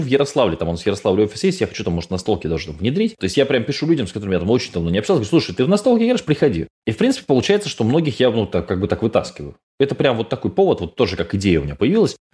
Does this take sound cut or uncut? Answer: cut